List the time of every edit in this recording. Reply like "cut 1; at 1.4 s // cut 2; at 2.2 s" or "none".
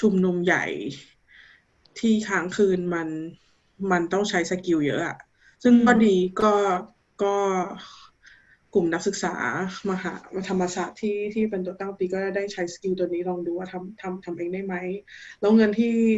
none